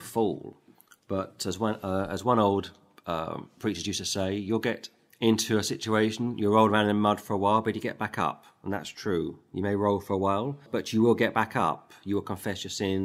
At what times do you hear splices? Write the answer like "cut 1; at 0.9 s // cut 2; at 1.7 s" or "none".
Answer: cut 1; at 10.7 s